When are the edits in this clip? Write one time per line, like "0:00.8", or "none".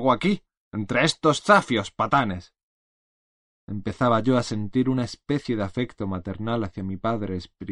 0:03.5